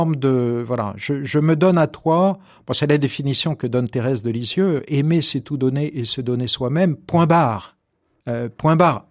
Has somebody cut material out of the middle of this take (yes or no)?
no